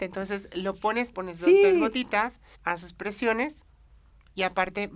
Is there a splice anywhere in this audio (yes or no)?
yes